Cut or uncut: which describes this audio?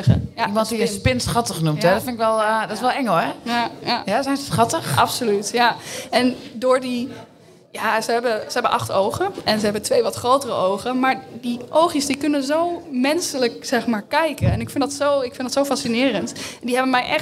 uncut